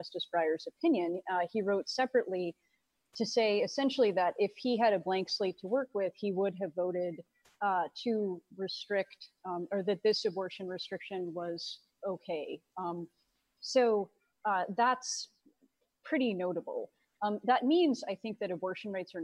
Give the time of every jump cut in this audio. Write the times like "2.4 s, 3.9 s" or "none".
none